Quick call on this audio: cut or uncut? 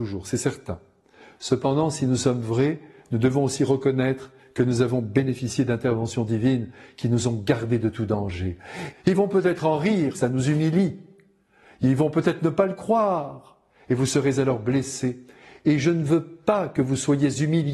cut